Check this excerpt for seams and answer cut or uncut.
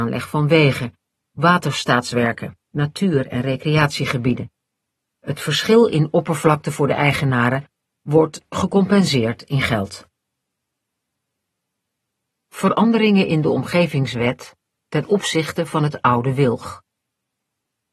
uncut